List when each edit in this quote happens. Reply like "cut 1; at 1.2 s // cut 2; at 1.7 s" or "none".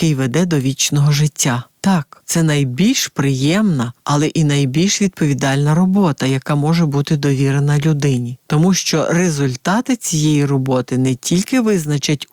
none